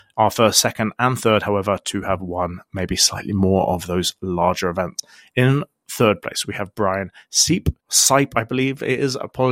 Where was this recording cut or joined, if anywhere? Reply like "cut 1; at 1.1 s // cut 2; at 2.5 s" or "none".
cut 1; at 7.8 s